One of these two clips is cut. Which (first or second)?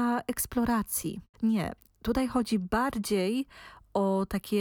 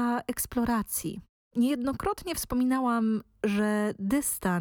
first